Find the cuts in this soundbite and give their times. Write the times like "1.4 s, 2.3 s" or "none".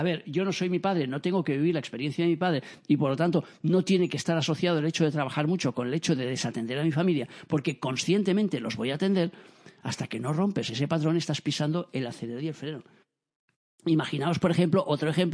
none